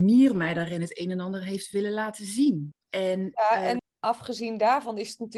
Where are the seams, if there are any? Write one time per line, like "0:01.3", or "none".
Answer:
0:02.7
0:03.8